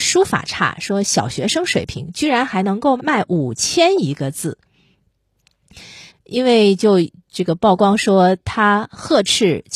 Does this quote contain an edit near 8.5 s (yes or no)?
no